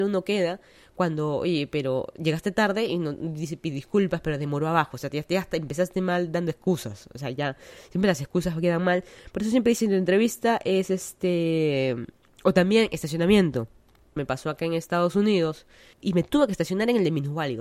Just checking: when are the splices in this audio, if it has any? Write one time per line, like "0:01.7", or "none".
0:14.2
0:15.9